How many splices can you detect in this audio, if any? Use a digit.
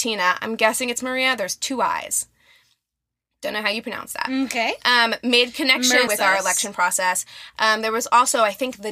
1